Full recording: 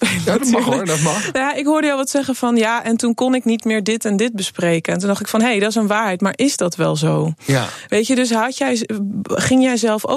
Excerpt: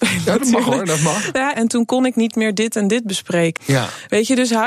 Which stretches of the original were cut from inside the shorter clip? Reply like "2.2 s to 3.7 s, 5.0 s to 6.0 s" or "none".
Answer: 1.5 s to 2.8 s, 4.9 s to 7.4 s